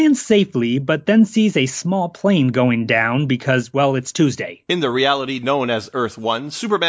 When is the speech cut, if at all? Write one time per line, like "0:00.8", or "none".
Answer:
none